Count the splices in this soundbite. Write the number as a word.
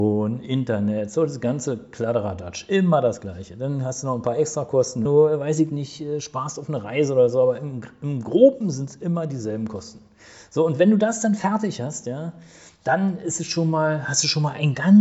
one